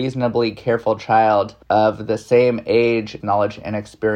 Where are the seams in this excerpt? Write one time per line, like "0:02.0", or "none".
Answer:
0:01.6
0:03.2